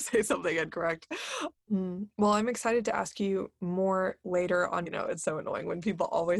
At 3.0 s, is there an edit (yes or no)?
no